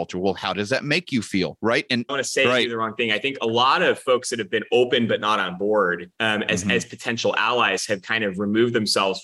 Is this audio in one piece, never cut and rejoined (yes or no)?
no